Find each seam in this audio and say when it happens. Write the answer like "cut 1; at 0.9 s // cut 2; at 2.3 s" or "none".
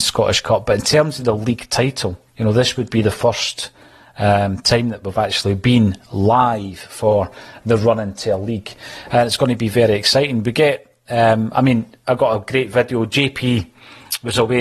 cut 1; at 2.3 s